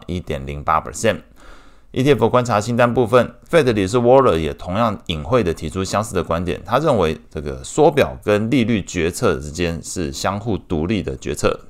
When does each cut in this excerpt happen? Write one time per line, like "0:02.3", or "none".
0:03.5